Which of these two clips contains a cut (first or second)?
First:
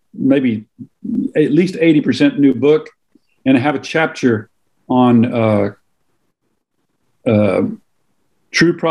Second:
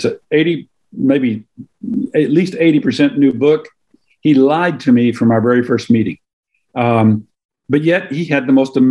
second